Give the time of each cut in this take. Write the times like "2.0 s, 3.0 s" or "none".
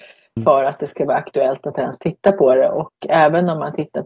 none